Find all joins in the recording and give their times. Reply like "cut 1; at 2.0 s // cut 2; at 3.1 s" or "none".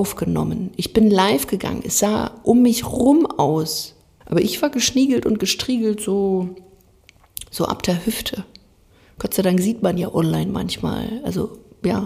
cut 1; at 4.2 s

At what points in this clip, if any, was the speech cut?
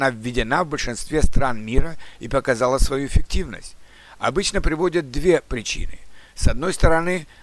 none

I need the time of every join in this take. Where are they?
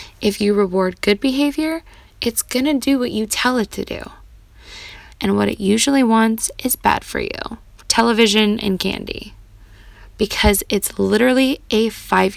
cut 1; at 5.1 s // cut 2; at 7.8 s

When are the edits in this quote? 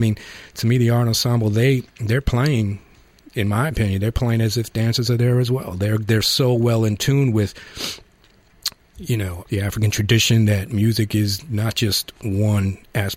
cut 1; at 9.5 s

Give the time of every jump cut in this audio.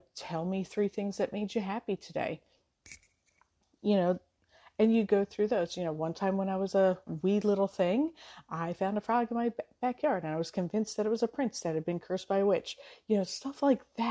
none

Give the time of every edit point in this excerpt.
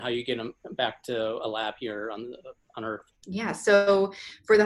cut 1; at 3.2 s

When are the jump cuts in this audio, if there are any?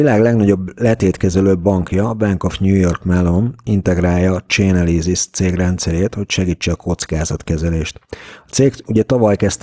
none

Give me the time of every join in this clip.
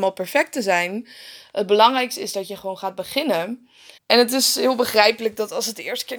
cut 1; at 4.0 s

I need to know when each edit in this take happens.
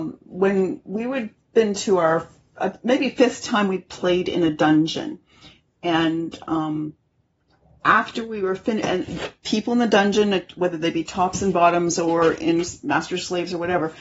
none

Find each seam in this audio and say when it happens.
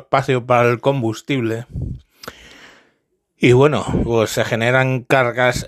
none

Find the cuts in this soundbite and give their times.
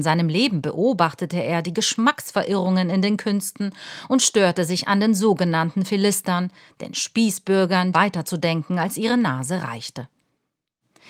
cut 1; at 7.9 s

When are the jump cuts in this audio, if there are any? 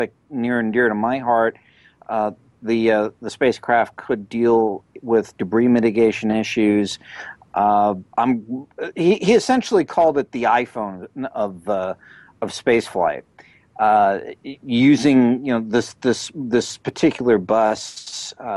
none

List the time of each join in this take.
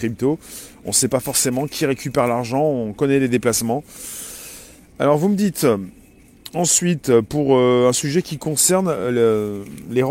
none

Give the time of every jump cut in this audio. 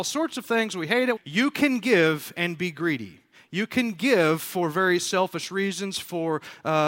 cut 1; at 1.2 s

